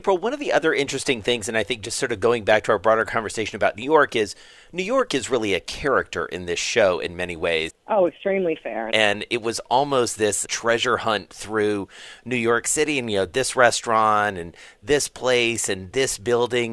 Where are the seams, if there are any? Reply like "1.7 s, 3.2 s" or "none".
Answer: 7.7 s, 8.9 s, 10.4 s